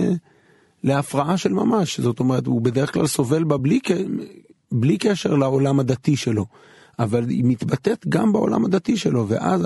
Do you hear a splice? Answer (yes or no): no